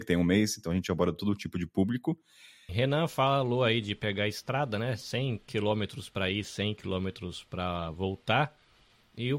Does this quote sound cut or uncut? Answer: cut